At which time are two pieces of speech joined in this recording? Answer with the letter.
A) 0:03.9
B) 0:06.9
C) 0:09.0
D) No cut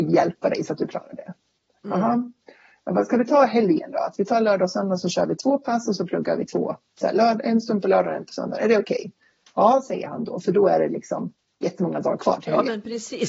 D